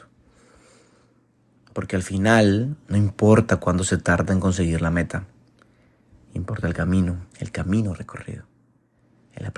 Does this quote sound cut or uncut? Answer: cut